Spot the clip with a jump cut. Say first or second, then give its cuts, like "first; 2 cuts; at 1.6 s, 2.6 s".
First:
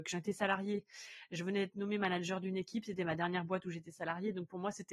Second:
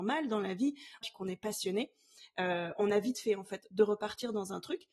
second; 1 cut; at 1.0 s